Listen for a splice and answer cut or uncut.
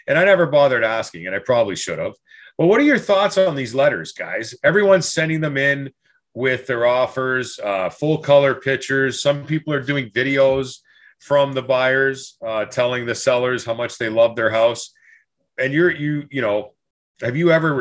uncut